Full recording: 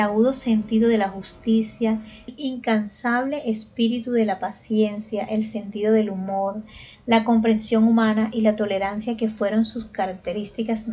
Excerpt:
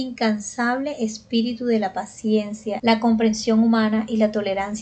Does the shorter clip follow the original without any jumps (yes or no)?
no